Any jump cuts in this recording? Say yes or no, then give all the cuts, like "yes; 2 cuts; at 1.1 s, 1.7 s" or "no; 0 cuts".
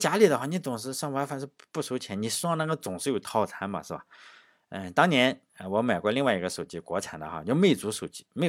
no; 0 cuts